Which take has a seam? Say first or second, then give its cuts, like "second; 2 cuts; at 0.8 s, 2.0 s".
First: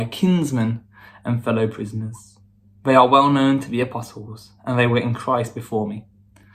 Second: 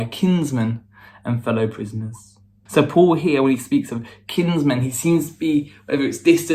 second; 1 cut; at 2.7 s